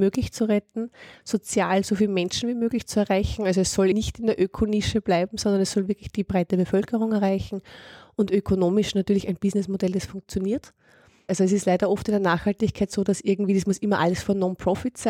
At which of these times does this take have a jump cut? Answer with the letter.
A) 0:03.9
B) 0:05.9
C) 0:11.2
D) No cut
A